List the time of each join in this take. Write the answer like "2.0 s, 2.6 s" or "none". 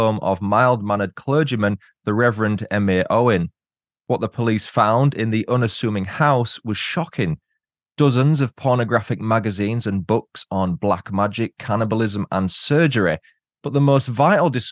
none